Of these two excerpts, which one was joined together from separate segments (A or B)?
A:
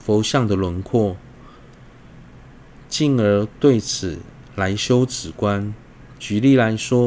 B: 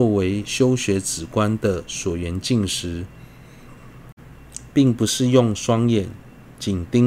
A